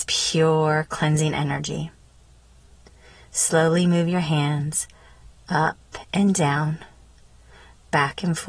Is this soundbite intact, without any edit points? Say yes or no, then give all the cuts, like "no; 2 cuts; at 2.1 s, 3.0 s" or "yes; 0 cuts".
yes; 0 cuts